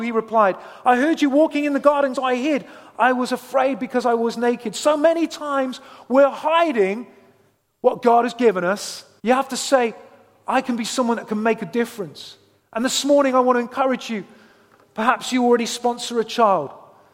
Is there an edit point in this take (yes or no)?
yes